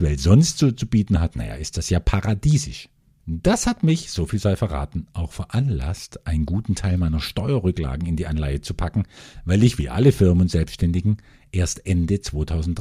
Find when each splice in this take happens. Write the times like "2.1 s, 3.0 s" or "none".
3.2 s